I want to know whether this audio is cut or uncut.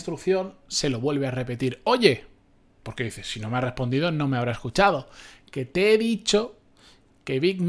uncut